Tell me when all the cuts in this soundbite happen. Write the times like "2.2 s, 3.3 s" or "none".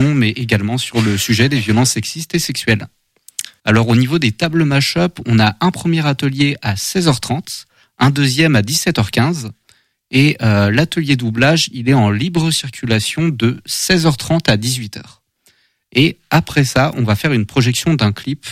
3.6 s

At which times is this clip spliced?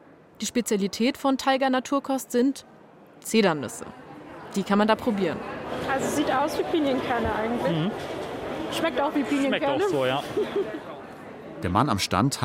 none

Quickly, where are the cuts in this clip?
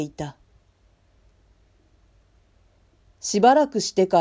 3.0 s

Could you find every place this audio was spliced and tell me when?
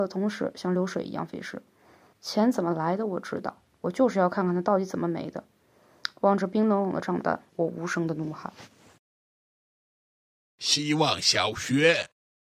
2.1 s, 7.5 s

